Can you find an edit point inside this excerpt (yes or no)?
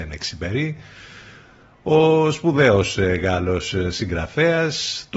no